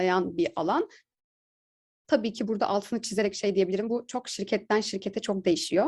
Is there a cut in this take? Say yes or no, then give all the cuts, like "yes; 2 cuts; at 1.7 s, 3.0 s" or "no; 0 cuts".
no; 0 cuts